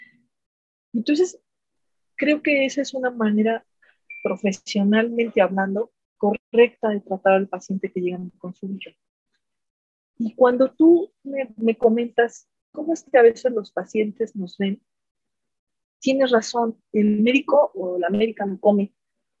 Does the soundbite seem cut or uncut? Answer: cut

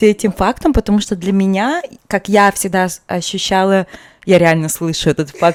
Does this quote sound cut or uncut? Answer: uncut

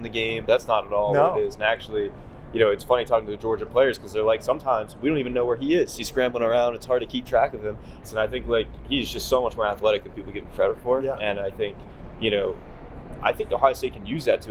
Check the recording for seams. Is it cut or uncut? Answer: cut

